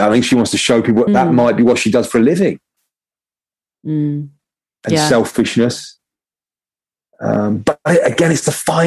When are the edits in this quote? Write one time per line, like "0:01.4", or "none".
0:01.1
0:03.7